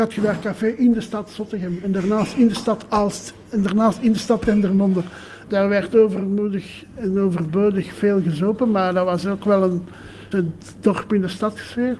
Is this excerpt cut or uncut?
cut